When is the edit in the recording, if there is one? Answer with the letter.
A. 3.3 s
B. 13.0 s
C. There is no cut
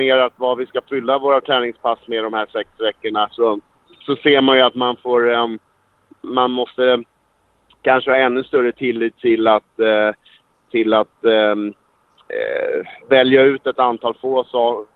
B